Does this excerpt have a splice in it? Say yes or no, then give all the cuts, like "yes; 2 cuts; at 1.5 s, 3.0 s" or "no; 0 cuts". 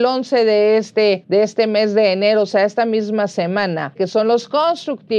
yes; 1 cut; at 4.0 s